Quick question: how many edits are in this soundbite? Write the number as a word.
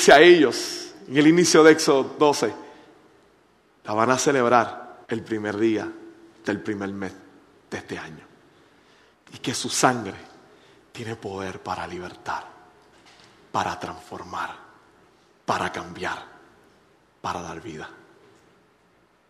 two